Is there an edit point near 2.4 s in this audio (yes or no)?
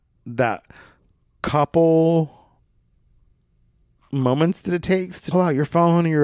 no